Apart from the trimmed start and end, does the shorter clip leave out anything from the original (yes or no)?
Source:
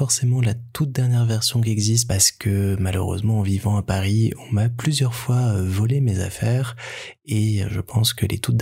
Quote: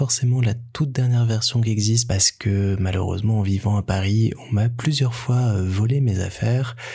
no